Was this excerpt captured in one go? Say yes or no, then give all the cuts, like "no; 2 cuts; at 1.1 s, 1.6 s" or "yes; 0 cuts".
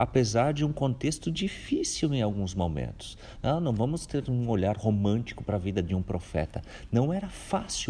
yes; 0 cuts